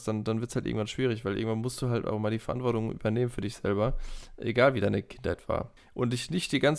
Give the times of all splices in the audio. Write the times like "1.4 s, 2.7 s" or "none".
5.8 s